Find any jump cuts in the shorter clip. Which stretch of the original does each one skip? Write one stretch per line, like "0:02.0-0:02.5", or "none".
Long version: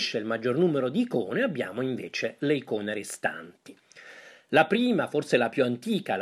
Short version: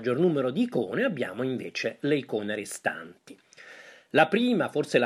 none